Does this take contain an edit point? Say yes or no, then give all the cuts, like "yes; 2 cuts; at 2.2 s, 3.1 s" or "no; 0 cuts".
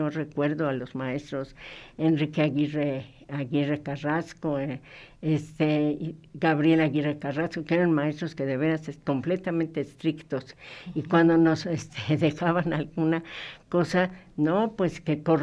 no; 0 cuts